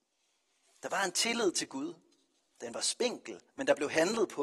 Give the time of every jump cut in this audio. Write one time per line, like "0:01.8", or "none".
0:03.5